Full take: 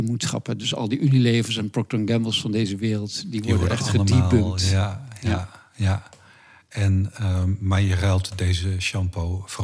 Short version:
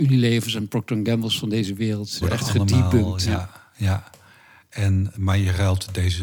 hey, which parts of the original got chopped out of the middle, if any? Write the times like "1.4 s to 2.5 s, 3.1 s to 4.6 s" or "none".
3.2 s to 3.6 s, 4.6 s to 5.2 s, 7.1 s to 7.6 s